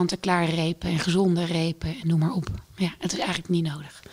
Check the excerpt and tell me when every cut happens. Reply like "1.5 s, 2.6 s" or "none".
none